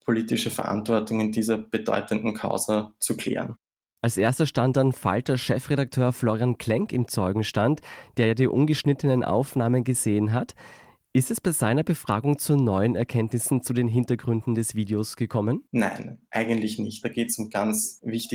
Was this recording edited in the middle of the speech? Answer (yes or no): yes